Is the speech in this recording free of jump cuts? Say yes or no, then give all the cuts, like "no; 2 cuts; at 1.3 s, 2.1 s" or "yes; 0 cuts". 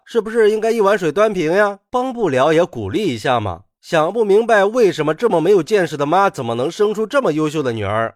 yes; 0 cuts